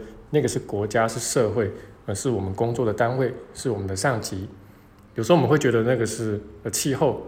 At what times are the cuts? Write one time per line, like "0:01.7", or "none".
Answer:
none